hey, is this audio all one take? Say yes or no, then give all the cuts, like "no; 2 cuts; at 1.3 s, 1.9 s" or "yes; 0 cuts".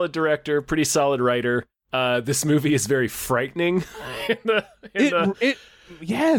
yes; 0 cuts